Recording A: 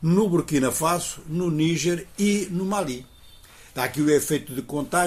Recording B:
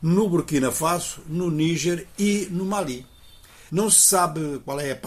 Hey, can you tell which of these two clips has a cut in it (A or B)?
B